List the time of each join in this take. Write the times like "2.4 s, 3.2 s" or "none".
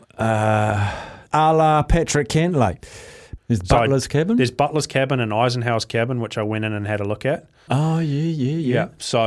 1.3 s, 3.4 s, 7.7 s